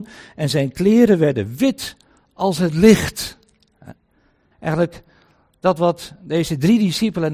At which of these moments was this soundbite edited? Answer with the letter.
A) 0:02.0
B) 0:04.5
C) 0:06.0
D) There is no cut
B